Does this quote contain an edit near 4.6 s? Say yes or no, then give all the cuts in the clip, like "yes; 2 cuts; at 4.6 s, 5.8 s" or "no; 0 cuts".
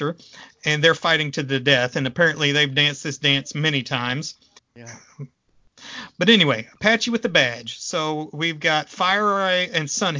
yes; 1 cut; at 4.6 s